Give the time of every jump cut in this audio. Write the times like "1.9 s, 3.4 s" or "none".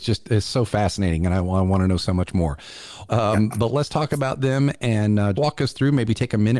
3.1 s, 5.3 s